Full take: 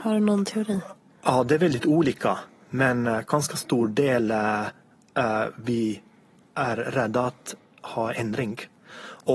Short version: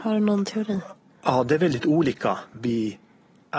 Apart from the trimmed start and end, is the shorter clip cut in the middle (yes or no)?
yes